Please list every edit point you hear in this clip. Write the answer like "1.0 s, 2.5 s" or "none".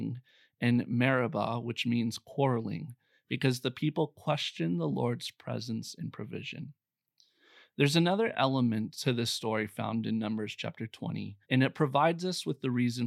11.4 s